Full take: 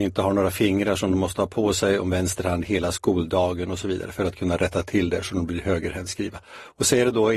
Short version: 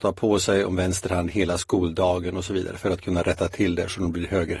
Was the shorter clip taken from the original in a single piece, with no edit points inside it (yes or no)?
yes